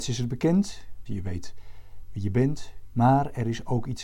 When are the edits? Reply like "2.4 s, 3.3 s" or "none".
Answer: 1.1 s, 2.9 s